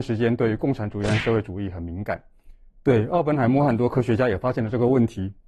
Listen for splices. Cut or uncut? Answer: cut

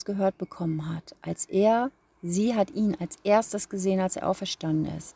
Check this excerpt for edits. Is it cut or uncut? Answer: uncut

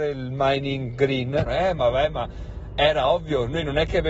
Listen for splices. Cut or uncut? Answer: cut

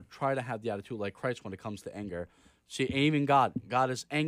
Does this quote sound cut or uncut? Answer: uncut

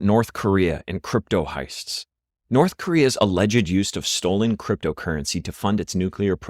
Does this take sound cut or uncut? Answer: uncut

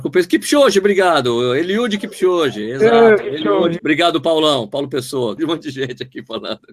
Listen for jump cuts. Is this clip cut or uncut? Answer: cut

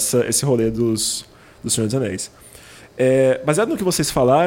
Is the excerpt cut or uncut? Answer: uncut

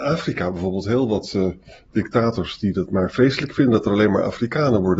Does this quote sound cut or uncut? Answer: uncut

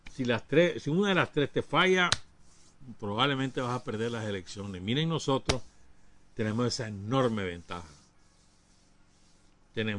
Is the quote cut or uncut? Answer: uncut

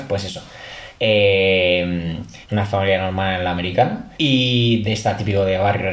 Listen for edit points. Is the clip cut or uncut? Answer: cut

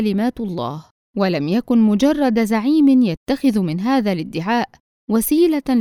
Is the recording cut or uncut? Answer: cut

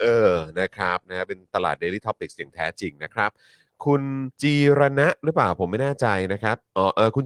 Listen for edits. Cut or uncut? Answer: cut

